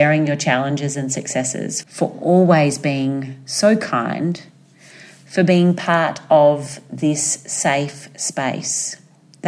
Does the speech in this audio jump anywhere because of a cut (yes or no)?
yes